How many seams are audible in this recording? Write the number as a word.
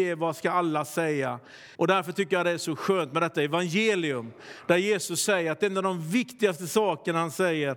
one